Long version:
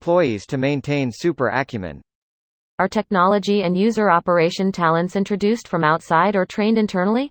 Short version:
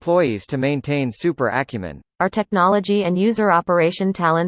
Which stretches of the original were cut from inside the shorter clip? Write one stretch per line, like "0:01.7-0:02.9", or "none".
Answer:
0:02.1-0:02.7